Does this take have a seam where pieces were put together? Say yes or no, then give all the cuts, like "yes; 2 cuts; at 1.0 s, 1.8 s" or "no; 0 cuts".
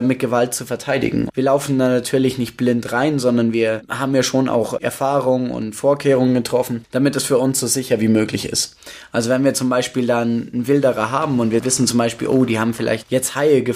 yes; 1 cut; at 1.3 s